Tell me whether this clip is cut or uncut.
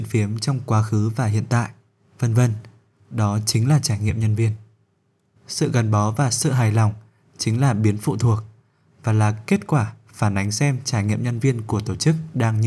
cut